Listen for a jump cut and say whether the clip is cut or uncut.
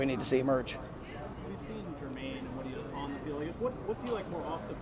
uncut